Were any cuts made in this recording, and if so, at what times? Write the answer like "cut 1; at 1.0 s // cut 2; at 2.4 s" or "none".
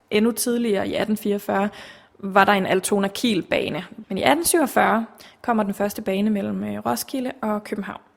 cut 1; at 4.0 s